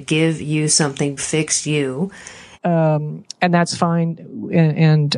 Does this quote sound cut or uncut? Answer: cut